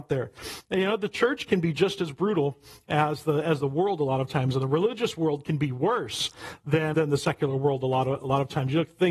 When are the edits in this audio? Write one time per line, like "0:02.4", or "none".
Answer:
0:06.9